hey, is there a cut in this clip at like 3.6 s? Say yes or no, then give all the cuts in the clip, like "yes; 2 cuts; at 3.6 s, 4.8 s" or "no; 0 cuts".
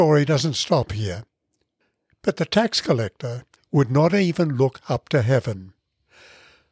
yes; 1 cut; at 3.6 s